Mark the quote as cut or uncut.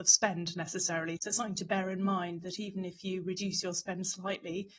cut